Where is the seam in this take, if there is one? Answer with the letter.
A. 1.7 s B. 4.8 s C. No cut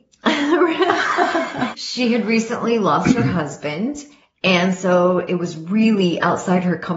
A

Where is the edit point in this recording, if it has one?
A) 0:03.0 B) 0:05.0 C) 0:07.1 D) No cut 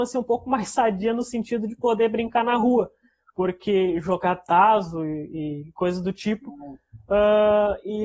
D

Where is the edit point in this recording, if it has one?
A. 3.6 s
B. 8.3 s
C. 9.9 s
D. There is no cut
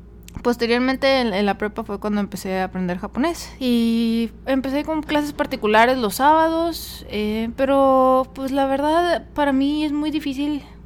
A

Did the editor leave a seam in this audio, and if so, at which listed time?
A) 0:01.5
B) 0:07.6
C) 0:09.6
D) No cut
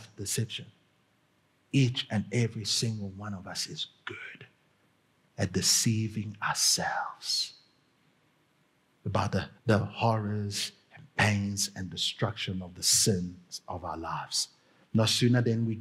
C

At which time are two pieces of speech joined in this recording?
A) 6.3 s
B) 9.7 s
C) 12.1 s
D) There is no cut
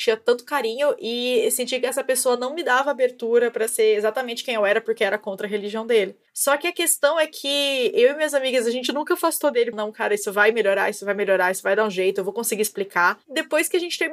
B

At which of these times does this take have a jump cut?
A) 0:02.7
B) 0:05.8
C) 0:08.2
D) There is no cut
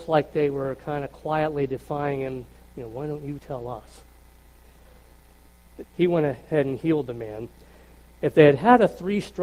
B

